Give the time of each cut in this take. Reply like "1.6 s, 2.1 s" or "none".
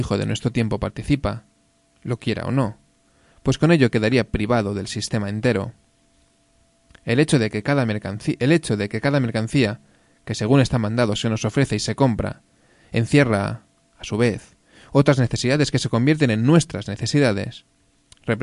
none